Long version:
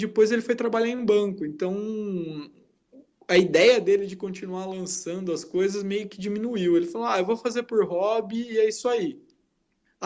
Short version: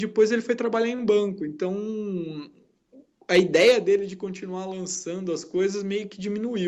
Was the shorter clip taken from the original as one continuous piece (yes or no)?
yes